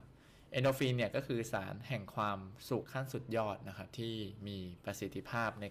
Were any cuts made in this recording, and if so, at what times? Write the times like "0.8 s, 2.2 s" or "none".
2.8 s